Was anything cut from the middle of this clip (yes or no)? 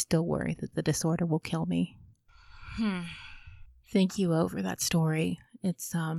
no